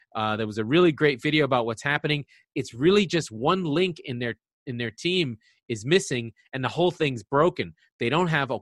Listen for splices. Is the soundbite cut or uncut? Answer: uncut